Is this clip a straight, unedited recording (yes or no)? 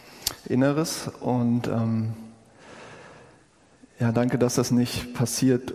yes